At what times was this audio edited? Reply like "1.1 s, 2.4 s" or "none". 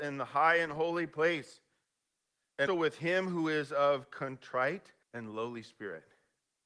2.7 s, 5.0 s